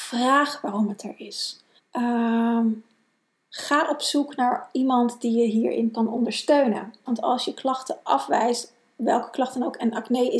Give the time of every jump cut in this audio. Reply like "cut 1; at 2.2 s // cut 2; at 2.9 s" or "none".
cut 1; at 1.8 s // cut 2; at 7.1 s

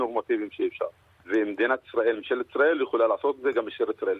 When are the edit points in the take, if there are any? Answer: cut 1; at 1.1 s

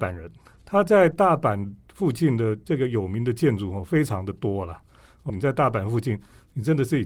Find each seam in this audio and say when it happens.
cut 1; at 5.3 s

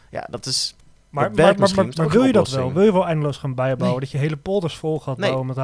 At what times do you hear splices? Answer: none

